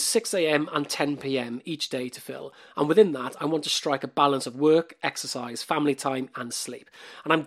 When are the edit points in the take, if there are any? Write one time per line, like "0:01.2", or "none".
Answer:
0:06.3